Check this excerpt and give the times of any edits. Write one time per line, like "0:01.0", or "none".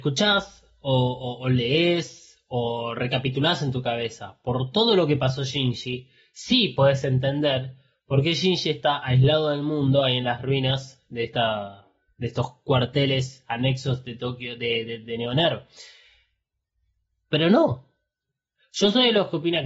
none

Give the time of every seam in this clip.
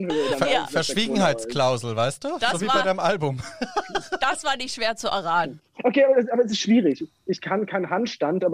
none

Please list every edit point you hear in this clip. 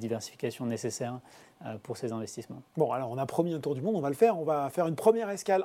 none

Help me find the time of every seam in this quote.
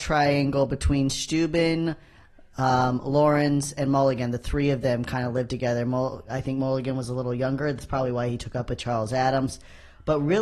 none

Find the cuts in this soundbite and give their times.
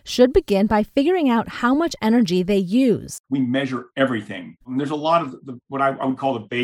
0:03.2
0:04.6

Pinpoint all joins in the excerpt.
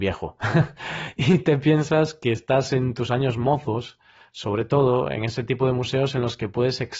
none

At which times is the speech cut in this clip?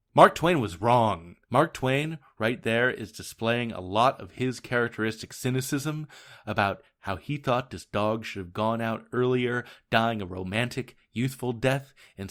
0:01.4

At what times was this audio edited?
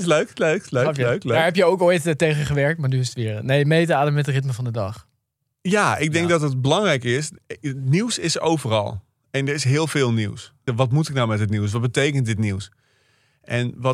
0:10.7

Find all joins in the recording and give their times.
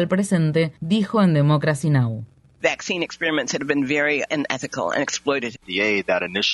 0:05.6

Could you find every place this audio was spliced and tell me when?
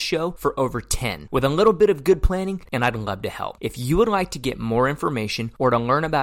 0:02.7

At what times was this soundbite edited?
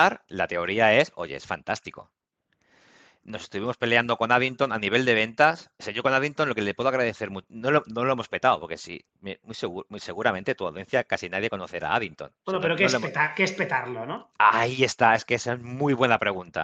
none

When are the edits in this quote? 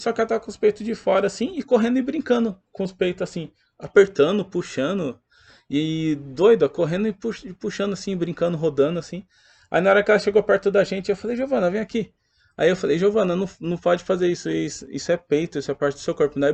none

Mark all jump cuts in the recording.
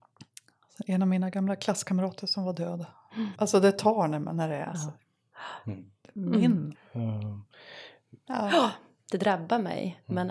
0:03.3
0:06.7
0:08.3

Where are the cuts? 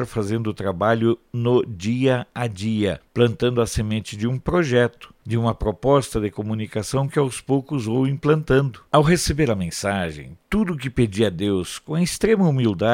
0:08.9

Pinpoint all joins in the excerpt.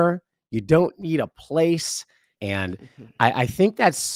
0:02.4

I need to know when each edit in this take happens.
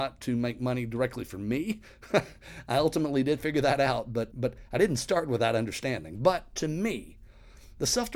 0:04.3

